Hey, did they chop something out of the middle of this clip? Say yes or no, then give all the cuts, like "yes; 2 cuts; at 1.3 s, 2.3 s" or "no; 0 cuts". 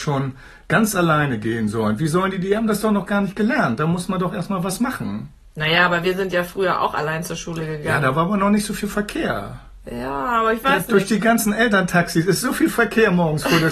no; 0 cuts